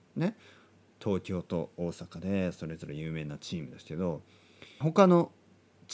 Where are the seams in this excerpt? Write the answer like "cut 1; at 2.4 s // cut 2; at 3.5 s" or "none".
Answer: cut 1; at 4.8 s